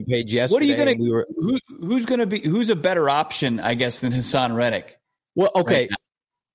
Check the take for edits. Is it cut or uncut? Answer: uncut